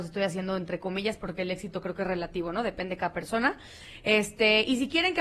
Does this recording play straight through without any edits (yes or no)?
yes